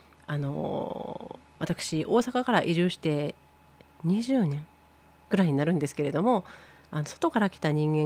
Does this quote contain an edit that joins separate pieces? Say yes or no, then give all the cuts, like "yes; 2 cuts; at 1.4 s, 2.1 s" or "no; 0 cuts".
no; 0 cuts